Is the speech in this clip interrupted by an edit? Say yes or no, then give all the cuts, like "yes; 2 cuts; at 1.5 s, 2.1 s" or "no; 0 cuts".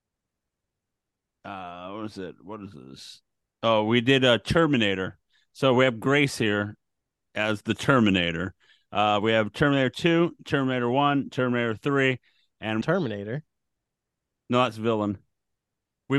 yes; 2 cuts; at 11.3 s, 12.8 s